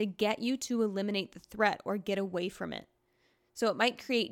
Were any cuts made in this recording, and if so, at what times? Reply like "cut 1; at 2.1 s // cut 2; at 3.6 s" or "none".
none